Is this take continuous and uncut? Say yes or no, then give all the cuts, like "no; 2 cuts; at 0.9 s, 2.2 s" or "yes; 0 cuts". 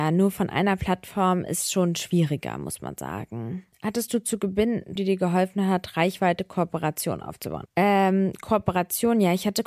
no; 3 cuts; at 3.7 s, 5.0 s, 7.7 s